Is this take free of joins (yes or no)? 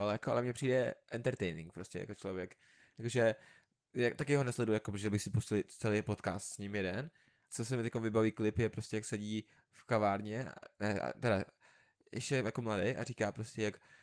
no